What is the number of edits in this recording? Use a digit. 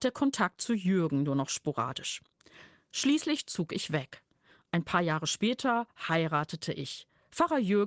0